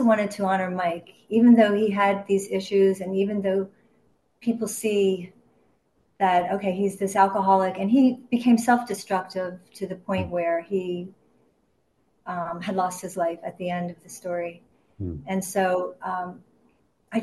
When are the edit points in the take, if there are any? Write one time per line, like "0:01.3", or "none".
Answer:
none